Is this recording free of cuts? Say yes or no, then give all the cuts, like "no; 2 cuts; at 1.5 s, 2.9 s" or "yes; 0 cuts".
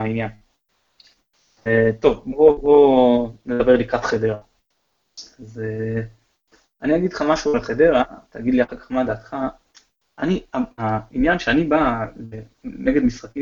yes; 0 cuts